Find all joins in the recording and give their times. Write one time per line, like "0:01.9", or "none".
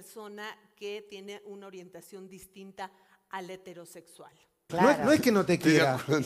0:04.7